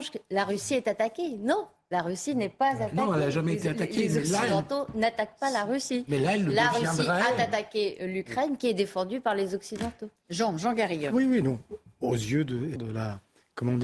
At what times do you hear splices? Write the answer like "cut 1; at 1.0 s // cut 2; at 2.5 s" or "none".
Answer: cut 1; at 12.8 s